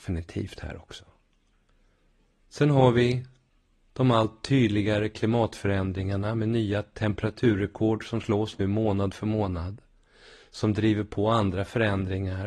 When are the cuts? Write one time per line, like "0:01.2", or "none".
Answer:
none